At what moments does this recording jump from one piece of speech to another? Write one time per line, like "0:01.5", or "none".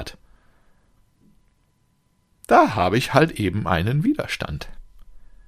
none